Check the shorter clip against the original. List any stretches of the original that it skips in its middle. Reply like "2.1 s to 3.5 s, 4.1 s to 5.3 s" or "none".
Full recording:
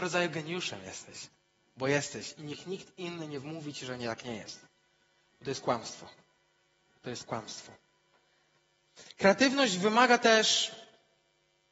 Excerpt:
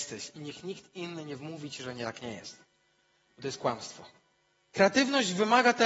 6.7 s to 9.2 s